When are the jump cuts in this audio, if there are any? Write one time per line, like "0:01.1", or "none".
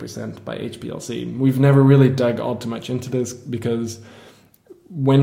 none